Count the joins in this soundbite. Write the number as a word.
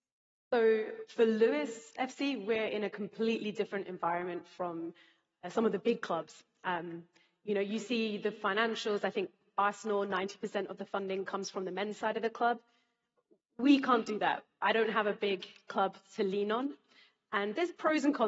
zero